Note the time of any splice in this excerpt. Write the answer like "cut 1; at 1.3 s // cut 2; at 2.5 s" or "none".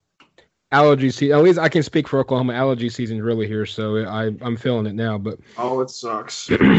none

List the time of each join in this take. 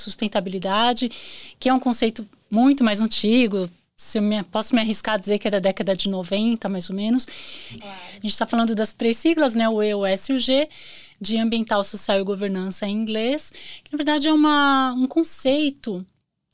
cut 1; at 7.8 s

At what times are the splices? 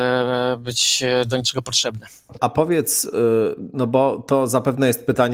cut 1; at 2.4 s

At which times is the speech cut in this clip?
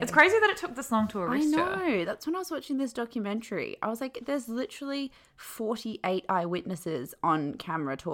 none

